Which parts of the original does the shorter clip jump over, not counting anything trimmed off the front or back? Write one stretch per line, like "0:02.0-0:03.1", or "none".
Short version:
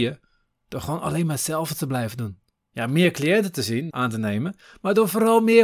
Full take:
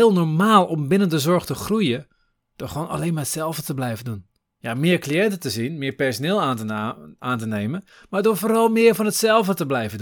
0:05.8-0:07.2

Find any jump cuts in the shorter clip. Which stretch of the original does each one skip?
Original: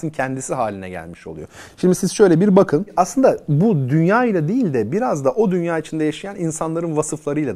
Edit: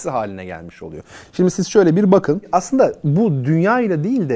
none

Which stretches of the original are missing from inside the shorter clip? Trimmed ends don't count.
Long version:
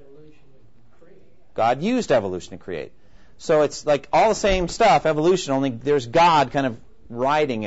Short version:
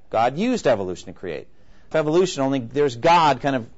0:03.4-0:05.0

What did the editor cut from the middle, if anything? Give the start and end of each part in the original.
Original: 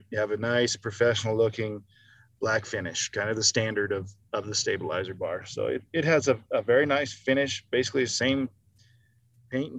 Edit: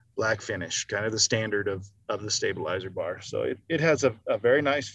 none

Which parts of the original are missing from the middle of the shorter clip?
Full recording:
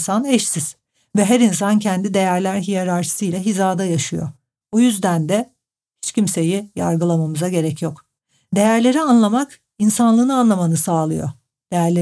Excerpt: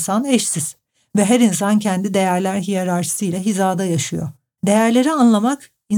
0:04.6-0:08.5

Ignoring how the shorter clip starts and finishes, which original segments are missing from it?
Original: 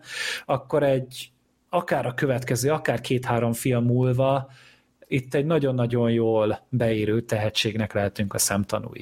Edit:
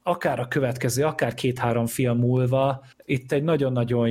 0:04.6-0:04.9

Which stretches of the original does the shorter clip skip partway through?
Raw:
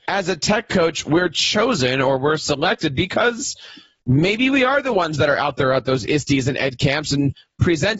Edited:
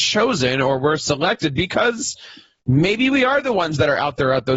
none

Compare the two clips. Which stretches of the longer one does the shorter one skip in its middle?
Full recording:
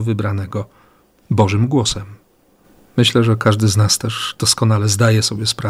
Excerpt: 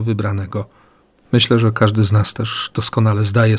0:01.2-0:02.9

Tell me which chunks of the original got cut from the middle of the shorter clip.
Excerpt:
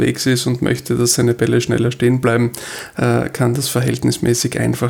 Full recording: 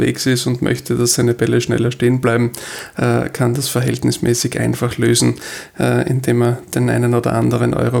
none

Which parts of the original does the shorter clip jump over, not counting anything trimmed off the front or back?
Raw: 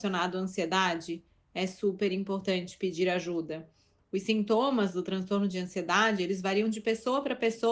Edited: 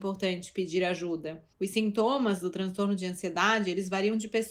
0:03.8-0:04.0

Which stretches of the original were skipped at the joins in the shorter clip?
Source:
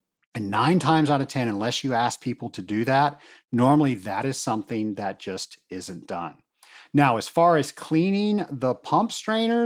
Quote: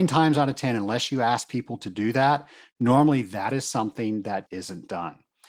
0:05.2-0:05.6

